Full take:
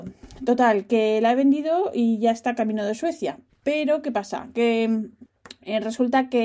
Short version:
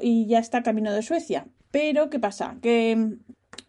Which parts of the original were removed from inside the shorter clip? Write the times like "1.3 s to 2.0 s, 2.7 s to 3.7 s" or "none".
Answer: none